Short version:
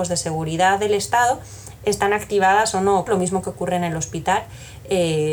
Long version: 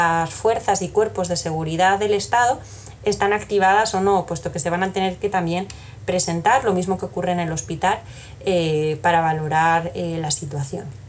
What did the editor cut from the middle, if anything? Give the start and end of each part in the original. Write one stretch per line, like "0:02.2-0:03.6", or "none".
0:04.3-0:06.6